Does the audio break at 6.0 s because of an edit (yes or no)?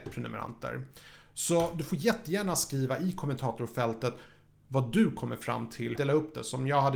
yes